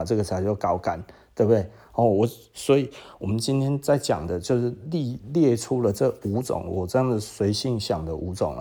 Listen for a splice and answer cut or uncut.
uncut